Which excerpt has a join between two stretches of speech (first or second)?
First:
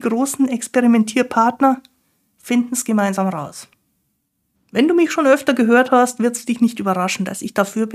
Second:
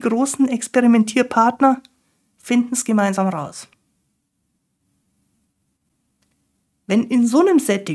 first